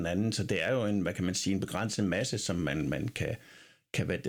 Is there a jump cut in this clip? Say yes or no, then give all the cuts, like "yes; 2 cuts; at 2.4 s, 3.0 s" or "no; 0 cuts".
no; 0 cuts